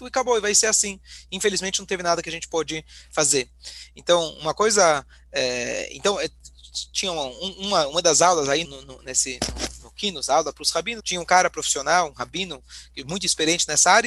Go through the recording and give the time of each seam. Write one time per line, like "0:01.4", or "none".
0:08.6
0:11.0